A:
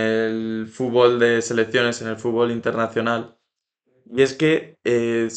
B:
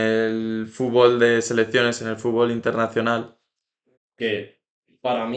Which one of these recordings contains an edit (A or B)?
B